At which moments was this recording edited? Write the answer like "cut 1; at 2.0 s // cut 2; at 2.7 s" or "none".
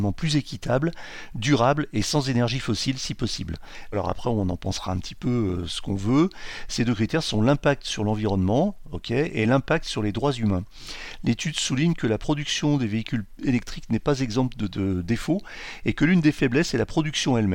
cut 1; at 3.9 s